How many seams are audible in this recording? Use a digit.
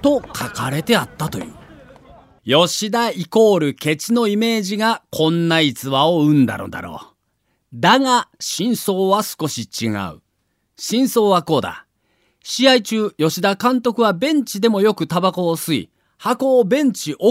1